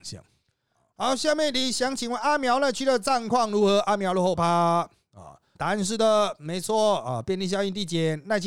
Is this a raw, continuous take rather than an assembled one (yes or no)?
no